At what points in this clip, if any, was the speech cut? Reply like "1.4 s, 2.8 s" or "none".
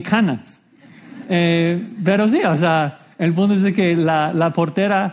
1.2 s